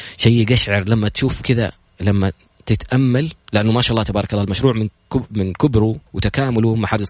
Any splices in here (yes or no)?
yes